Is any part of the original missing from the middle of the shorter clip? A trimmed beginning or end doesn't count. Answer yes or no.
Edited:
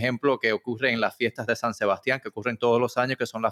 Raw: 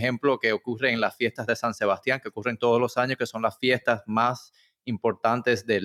no